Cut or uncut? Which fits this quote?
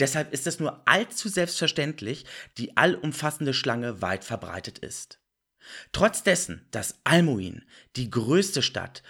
cut